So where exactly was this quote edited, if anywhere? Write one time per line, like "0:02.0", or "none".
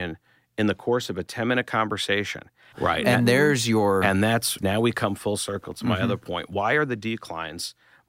0:02.7
0:04.6